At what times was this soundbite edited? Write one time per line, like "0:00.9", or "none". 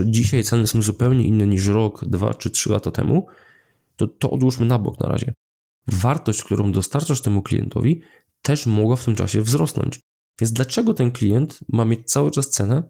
none